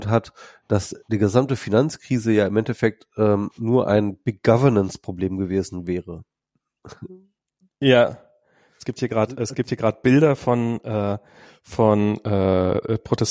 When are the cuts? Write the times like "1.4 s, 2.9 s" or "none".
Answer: none